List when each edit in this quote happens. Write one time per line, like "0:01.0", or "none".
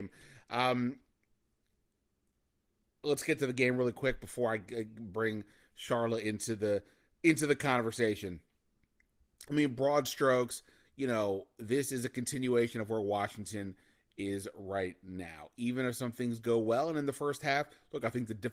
none